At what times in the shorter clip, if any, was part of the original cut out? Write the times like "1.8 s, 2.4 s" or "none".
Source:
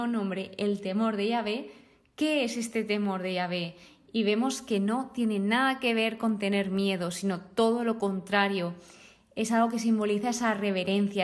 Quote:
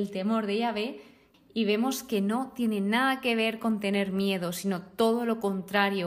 1.3 s